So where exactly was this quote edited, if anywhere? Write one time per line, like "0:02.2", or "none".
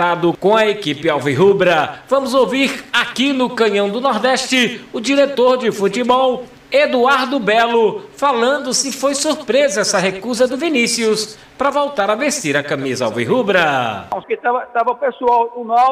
0:14.2